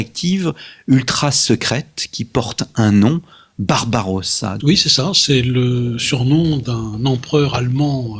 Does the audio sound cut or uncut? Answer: cut